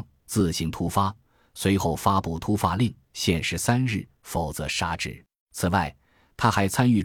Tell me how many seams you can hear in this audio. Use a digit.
1